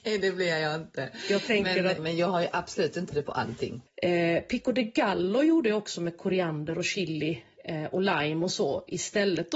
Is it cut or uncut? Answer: cut